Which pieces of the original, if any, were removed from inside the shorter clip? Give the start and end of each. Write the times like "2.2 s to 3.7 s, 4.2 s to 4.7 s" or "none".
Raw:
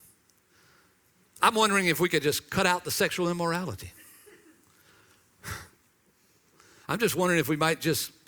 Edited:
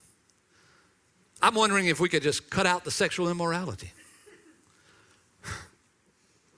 none